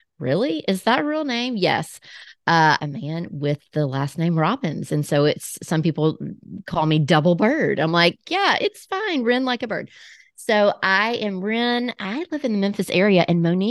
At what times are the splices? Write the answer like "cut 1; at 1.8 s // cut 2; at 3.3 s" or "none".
cut 1; at 2.8 s